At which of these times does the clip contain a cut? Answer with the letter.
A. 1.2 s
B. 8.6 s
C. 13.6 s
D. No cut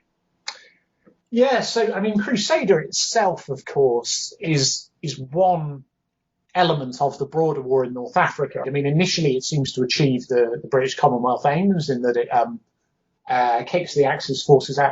B